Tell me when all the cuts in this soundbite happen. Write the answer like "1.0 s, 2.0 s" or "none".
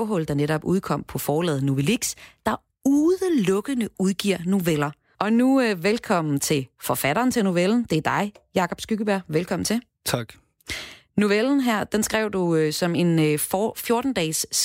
5.1 s